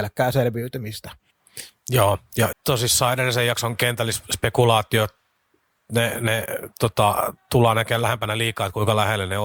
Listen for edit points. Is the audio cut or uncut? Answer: cut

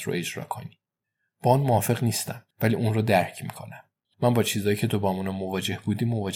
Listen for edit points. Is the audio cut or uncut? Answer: cut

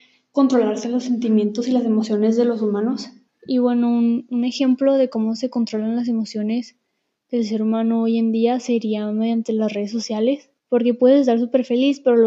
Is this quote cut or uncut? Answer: cut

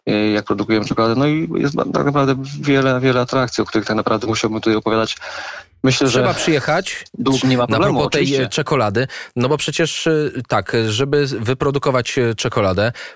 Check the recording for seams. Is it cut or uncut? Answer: cut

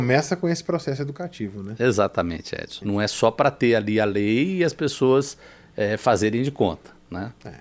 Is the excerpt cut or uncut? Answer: cut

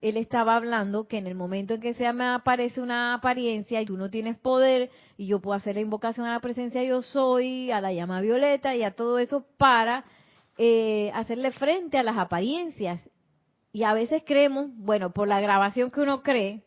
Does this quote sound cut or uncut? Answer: cut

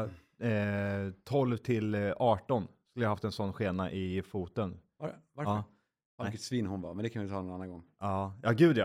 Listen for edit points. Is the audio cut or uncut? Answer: cut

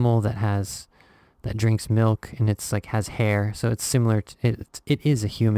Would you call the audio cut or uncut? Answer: uncut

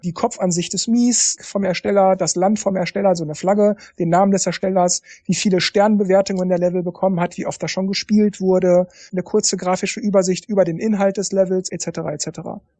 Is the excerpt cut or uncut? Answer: uncut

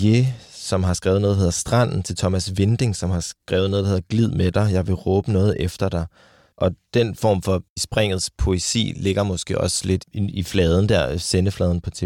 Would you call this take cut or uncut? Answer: cut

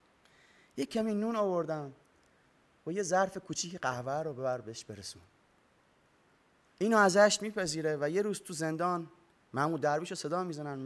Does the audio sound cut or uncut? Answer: cut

